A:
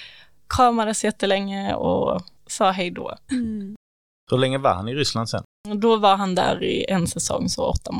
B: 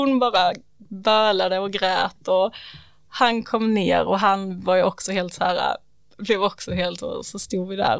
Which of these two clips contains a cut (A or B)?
A